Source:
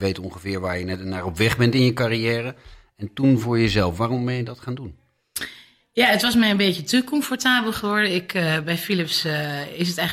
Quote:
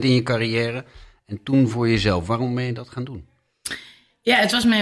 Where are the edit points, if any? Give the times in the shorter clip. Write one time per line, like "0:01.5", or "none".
none